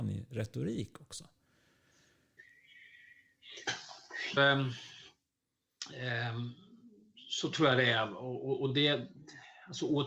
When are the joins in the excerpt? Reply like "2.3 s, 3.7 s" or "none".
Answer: 4.4 s